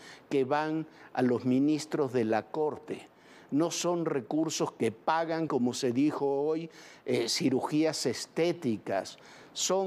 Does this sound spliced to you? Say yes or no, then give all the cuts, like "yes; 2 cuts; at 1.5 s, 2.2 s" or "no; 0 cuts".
no; 0 cuts